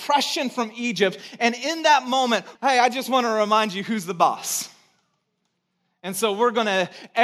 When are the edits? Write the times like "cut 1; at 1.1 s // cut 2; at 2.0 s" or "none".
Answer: cut 1; at 2.6 s